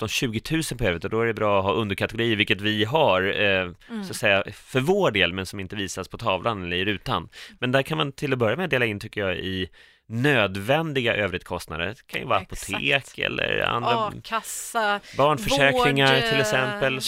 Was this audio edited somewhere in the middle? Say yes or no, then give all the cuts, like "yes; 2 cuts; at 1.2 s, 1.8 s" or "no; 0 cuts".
no; 0 cuts